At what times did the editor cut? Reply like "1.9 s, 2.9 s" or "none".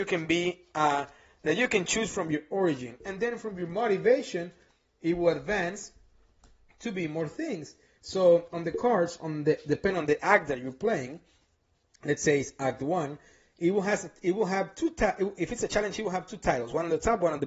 8.0 s

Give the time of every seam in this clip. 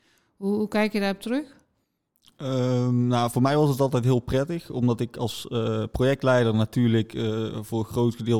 none

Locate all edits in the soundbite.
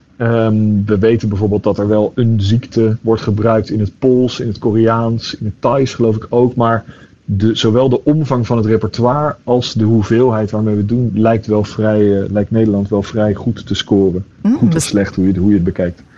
none

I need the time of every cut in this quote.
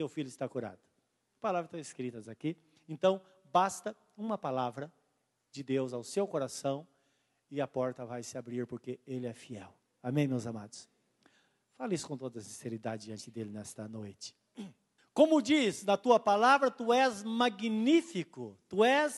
15.0 s

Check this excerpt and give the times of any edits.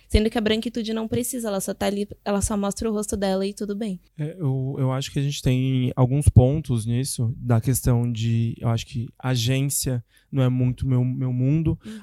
none

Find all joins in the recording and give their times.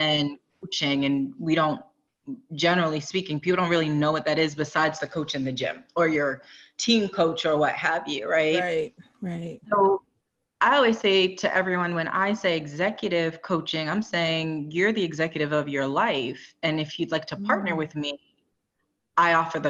none

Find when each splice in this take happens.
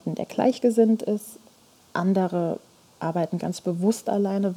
none

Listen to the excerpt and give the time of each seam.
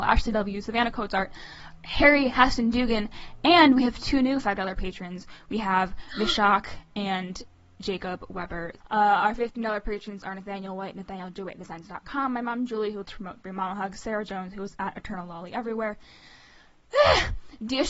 8.8 s, 13.0 s

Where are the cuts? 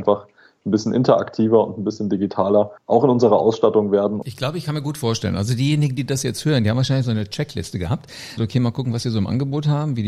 2.8 s, 4.2 s, 8.4 s

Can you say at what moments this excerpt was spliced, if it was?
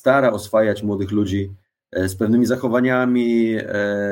none

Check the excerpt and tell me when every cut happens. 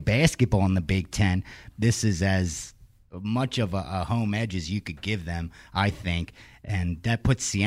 1.7 s

